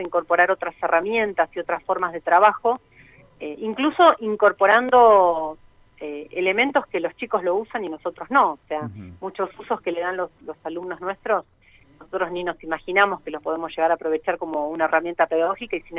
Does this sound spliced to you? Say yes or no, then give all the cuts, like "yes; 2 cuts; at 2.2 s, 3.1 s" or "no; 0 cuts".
no; 0 cuts